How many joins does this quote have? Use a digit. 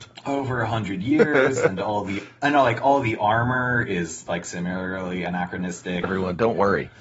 2